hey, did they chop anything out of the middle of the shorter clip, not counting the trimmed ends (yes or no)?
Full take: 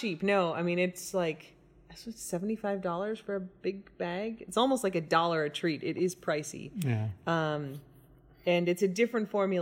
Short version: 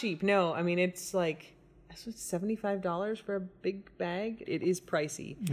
yes